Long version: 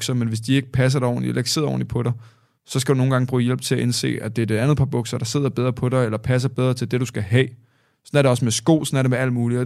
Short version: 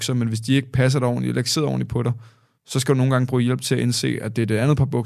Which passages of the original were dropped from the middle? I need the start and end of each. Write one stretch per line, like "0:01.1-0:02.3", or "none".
none